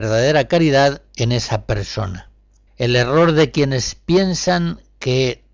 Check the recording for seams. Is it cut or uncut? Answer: cut